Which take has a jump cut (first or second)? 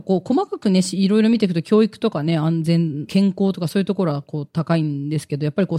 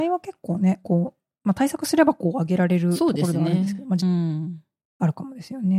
second